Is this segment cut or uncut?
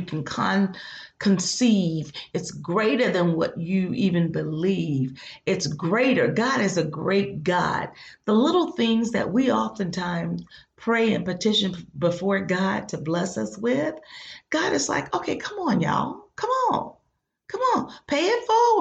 uncut